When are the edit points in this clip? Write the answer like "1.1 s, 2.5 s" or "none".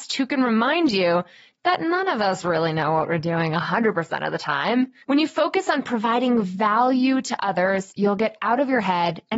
5.0 s